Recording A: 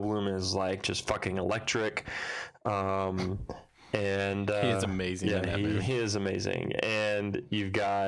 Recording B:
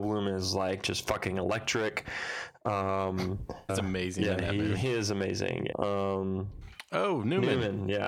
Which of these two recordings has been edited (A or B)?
B